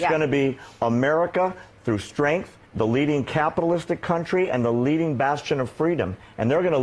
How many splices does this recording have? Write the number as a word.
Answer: one